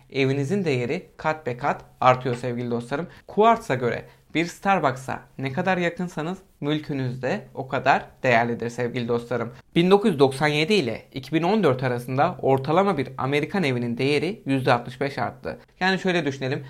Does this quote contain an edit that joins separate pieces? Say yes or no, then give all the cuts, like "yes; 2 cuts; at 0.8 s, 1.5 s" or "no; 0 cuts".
yes; 1 cut; at 15.7 s